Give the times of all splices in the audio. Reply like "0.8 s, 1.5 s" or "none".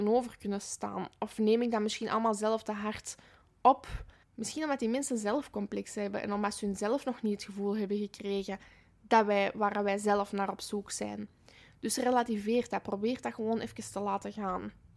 4.2 s